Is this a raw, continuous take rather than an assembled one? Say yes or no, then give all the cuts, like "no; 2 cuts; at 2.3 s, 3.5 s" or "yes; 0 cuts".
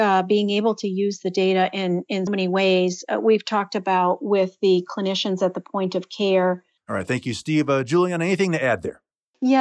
no; 2 cuts; at 2.3 s, 6.8 s